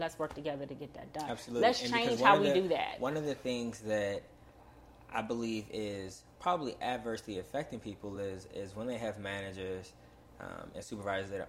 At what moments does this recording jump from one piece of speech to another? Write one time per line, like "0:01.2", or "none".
none